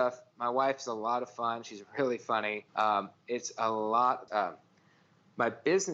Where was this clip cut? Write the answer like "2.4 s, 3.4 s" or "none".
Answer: 2.7 s, 4.3 s